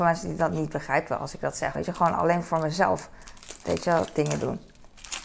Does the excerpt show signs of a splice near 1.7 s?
yes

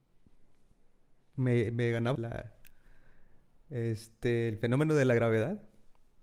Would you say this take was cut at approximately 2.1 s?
yes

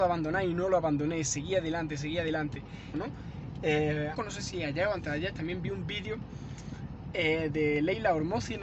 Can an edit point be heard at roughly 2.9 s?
yes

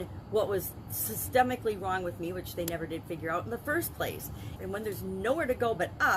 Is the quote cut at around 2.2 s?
no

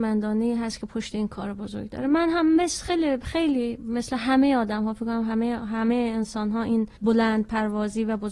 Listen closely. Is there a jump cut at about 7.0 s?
yes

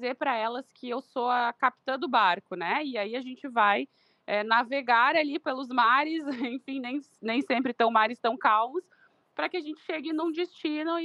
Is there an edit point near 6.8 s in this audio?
no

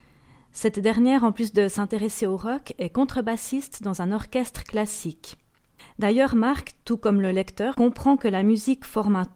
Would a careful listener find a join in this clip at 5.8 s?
yes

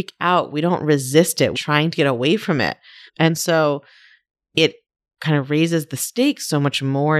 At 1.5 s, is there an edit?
yes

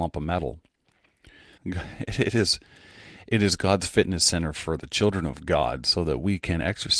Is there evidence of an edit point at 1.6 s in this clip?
yes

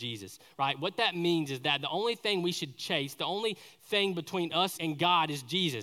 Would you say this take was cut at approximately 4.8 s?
yes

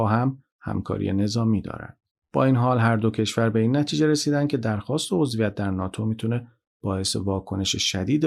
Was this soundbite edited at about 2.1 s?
yes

